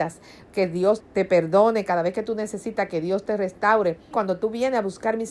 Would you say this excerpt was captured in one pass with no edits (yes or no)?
no